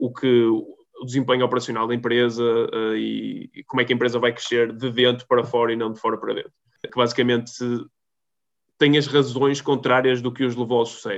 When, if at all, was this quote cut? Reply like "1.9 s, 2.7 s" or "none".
6.8 s